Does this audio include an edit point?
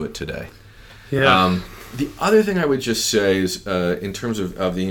no; 0 cuts

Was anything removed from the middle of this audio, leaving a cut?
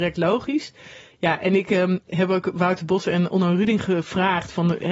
no; 0 cuts

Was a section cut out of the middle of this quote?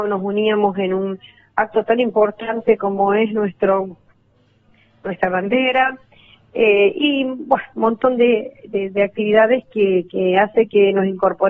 no; 0 cuts

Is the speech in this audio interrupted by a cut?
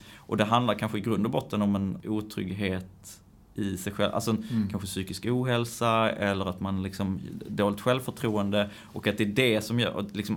no; 0 cuts

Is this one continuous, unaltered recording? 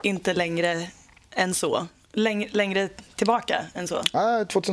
yes; 0 cuts

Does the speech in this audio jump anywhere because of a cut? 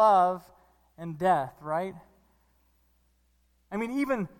no; 0 cuts

